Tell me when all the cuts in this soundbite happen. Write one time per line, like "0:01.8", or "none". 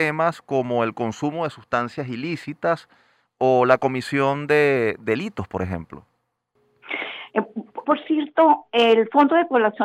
0:07.8